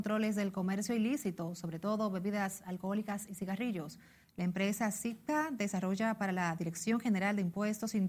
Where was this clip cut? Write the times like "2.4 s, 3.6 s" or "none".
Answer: 4.2 s